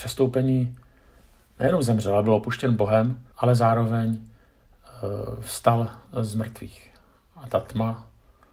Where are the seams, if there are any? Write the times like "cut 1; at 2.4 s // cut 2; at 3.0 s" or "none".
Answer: cut 1; at 3.3 s